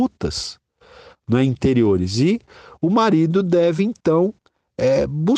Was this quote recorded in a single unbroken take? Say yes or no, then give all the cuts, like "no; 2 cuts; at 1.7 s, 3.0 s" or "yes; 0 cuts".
yes; 0 cuts